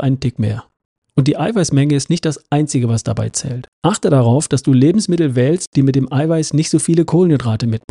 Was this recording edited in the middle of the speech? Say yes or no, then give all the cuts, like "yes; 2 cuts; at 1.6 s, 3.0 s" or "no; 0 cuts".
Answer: yes; 1 cut; at 3.7 s